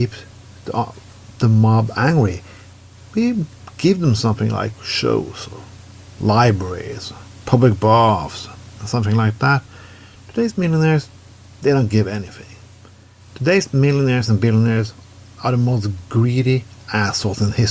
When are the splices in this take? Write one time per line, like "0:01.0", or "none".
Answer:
none